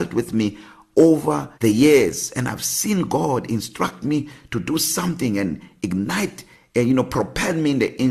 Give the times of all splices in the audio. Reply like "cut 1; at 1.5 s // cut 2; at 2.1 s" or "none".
cut 1; at 1.6 s